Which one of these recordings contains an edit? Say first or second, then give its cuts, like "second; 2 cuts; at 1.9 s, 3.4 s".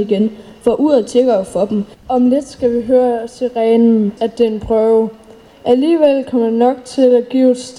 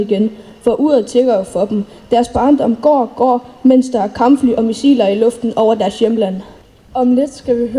first; 2 cuts; at 1.9 s, 4.2 s